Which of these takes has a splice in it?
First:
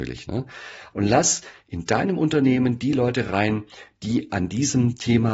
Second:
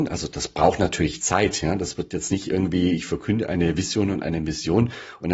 first; 1 cut; at 0.9 s

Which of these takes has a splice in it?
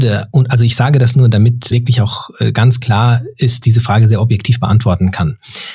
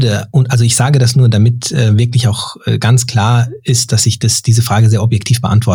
first; 2 cuts; at 1.7 s, 3.6 s

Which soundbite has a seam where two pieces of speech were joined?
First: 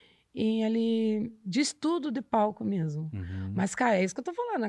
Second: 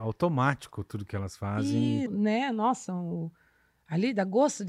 second; 1 cut; at 2.1 s

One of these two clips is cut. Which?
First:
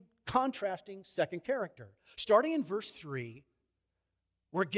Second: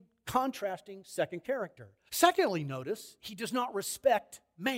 second; 1 cut; at 2.1 s

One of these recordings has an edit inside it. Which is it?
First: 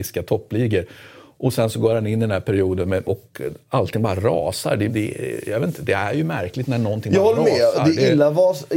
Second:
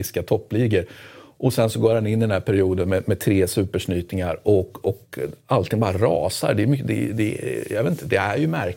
first; 2 cuts; at 3.0 s, 4.9 s

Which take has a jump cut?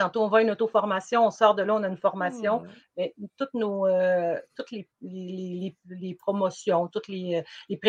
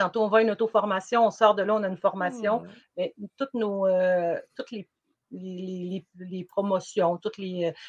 first; 1 cut; at 4.9 s

